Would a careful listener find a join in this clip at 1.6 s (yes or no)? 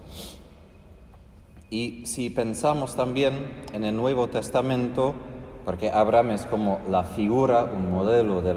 no